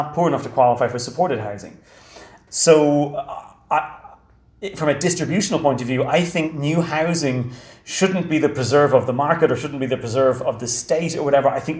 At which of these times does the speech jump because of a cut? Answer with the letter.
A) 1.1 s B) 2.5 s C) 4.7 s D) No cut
B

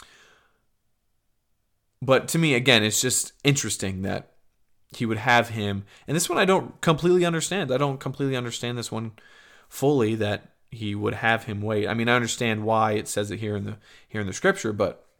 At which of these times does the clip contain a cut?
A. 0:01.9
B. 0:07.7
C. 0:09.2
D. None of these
D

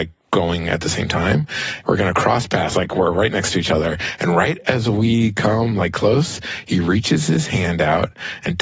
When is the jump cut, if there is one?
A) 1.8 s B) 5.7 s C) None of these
A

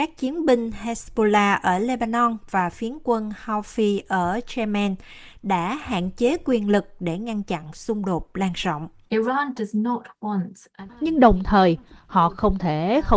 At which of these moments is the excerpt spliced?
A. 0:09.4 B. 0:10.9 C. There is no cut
B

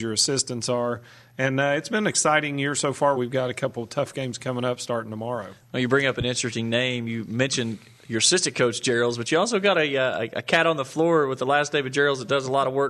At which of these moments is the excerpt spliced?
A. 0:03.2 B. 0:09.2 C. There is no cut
A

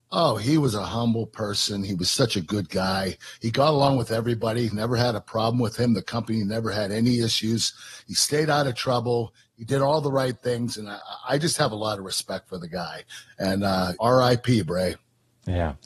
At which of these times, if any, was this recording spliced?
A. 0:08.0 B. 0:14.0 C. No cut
B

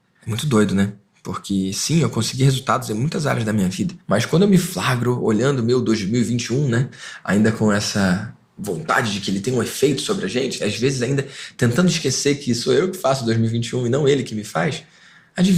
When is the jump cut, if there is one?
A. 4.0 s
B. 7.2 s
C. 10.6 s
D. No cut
C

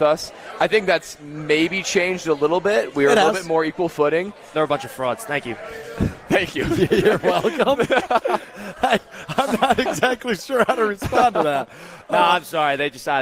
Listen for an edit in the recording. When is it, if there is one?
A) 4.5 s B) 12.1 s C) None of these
A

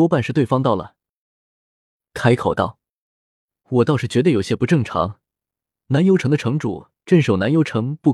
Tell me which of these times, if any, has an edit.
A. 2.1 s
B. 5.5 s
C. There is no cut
A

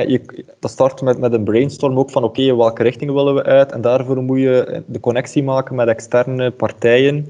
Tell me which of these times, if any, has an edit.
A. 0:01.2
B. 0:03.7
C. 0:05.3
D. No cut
D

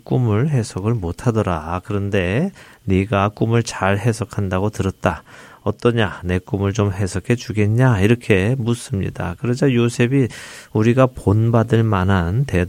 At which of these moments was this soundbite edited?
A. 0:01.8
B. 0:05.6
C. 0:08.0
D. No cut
D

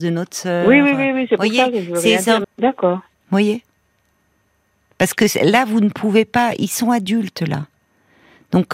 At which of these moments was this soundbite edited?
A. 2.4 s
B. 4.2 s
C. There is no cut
A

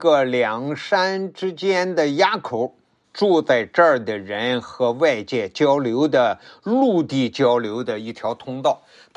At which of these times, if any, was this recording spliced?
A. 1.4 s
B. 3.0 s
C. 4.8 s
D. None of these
B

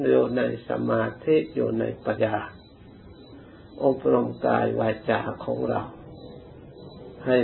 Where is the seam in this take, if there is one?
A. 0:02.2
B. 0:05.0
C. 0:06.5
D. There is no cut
A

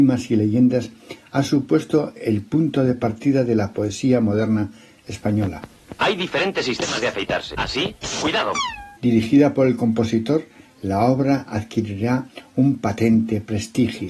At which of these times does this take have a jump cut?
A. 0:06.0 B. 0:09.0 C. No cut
B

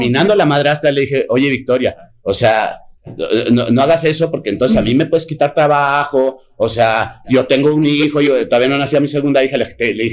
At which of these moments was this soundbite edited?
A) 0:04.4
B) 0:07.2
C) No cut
B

